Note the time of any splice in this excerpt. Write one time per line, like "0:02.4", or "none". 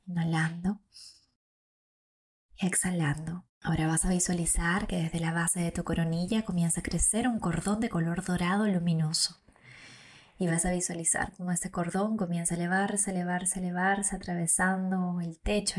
0:03.5